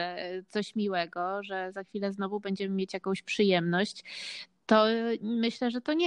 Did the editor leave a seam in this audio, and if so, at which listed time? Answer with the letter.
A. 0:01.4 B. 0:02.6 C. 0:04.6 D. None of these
D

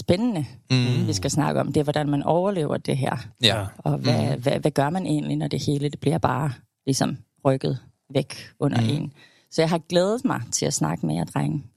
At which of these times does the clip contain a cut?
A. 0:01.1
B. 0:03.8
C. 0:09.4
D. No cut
B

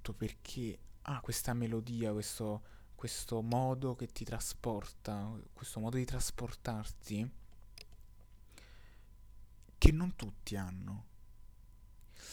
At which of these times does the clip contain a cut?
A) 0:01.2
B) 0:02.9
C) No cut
A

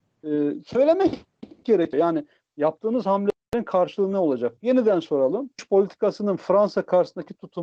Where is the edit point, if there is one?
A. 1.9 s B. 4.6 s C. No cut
A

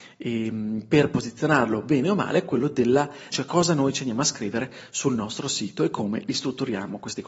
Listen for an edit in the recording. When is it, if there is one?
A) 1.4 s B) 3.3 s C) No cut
B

